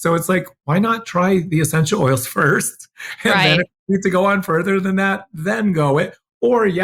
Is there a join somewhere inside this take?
no; 0 cuts

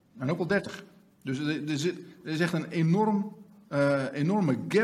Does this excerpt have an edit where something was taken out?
no; 0 cuts

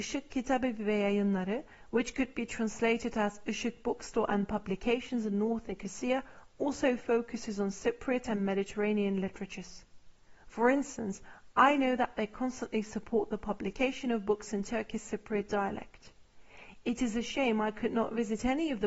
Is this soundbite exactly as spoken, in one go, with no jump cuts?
yes; 0 cuts

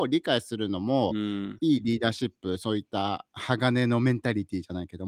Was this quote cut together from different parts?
no; 0 cuts

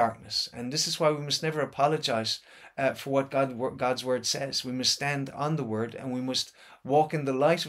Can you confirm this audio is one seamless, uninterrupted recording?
yes; 0 cuts

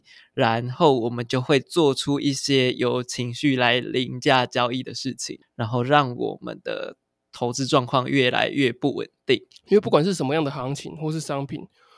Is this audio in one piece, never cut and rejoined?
no; 2 cuts; at 5.4 s, 9.6 s

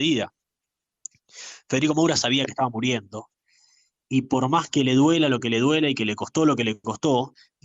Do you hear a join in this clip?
no; 0 cuts

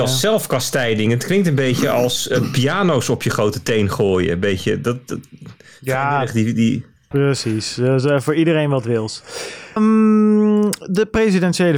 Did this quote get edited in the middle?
yes; 2 cuts; at 7.1 s, 9.8 s

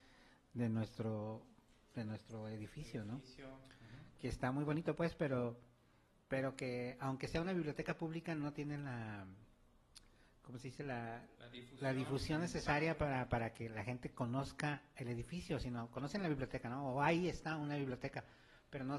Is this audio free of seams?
yes; 0 cuts

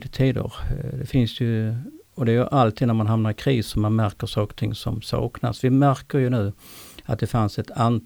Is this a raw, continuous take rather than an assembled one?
yes; 0 cuts

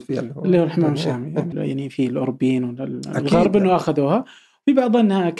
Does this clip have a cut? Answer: yes; 1 cut; at 1.5 s

